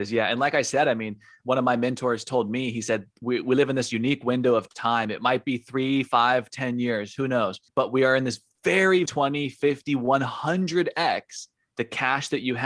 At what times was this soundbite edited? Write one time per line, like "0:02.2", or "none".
0:07.7
0:09.1